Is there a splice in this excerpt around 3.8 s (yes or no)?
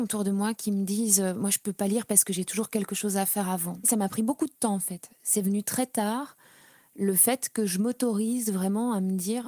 yes